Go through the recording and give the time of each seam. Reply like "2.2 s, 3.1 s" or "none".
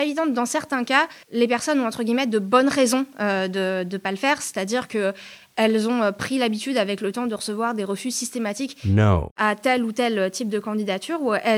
1.2 s